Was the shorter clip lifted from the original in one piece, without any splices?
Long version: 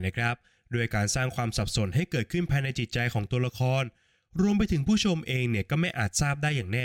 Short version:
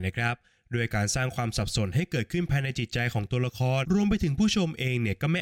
no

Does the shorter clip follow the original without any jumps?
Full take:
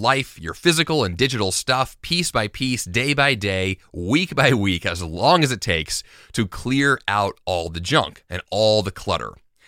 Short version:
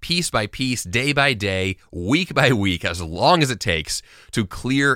yes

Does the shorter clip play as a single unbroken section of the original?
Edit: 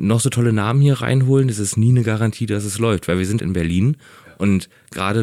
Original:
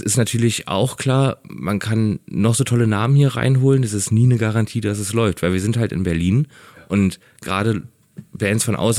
no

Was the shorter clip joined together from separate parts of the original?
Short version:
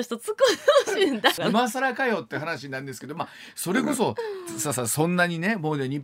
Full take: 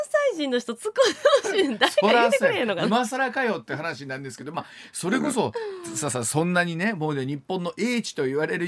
yes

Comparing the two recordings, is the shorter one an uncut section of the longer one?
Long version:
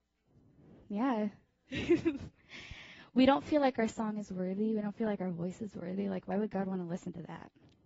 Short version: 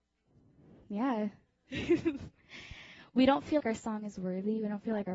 no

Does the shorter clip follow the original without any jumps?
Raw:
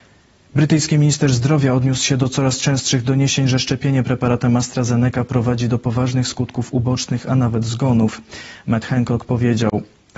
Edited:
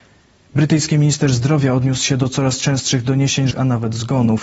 no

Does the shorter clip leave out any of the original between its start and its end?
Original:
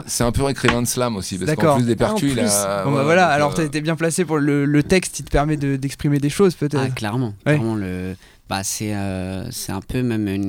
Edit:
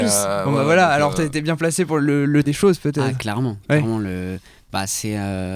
yes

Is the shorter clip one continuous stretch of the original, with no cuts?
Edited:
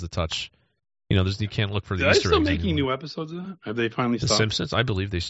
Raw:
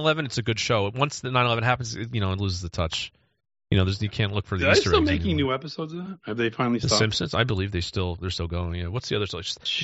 yes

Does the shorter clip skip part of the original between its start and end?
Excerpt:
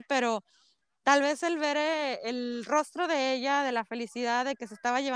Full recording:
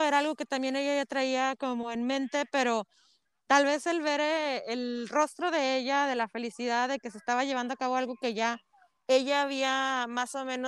no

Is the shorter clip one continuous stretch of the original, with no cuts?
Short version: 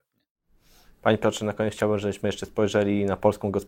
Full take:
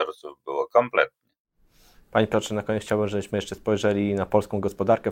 yes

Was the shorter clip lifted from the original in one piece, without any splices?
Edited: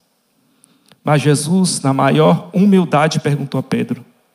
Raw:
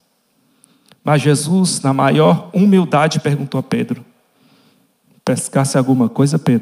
yes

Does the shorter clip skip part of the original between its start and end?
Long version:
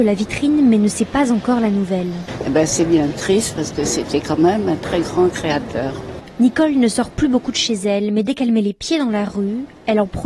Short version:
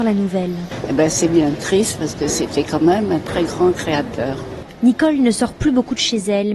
no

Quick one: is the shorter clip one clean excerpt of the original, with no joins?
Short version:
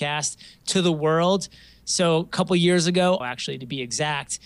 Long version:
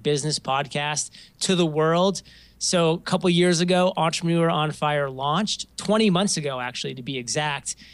no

